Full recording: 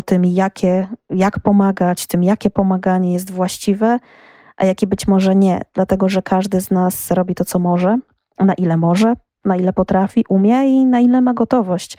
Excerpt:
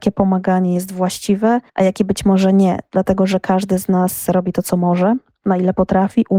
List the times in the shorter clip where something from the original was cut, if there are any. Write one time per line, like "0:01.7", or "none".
0:01.7
0:05.4